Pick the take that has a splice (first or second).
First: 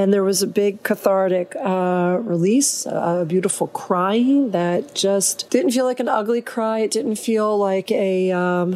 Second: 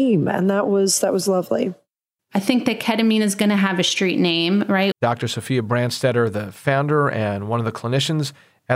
second